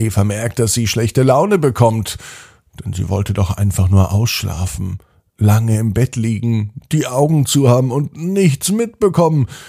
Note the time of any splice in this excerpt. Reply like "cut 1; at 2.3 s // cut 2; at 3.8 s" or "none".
none

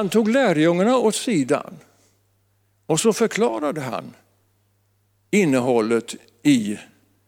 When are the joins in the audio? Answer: none

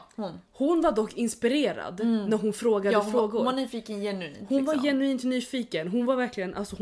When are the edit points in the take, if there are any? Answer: none

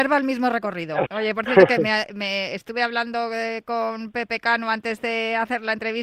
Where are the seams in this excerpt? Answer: cut 1; at 1.1 s

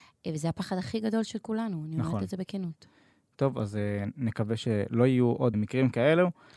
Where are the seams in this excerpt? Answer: cut 1; at 5.5 s

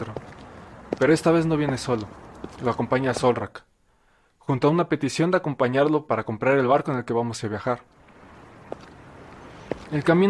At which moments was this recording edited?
none

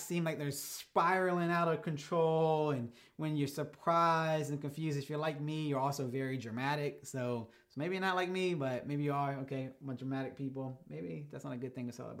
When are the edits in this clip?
none

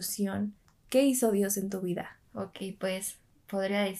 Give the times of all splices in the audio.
cut 1; at 2.2 s

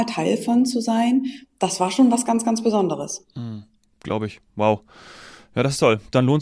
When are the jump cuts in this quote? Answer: none

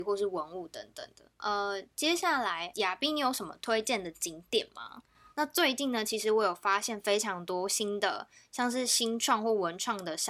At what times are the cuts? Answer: cut 1; at 5.3 s

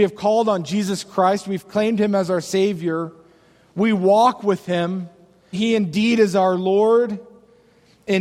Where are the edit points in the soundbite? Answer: cut 1; at 5.5 s

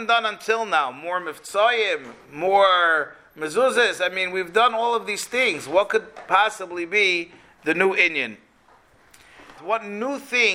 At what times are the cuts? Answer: cut 1; at 9.6 s

